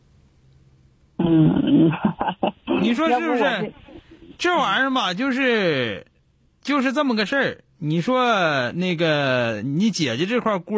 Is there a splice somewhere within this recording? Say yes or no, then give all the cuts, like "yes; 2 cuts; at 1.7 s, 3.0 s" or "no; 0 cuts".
no; 0 cuts